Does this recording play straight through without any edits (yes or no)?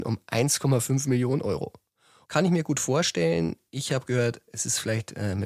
no